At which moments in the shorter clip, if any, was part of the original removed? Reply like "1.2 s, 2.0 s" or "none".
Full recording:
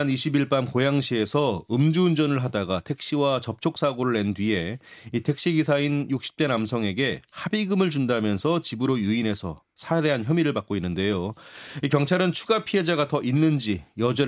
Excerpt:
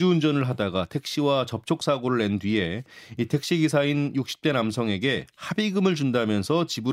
none